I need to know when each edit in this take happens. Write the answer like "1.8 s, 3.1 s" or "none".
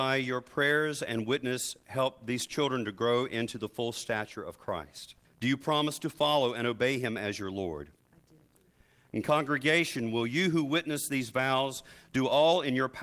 5.2 s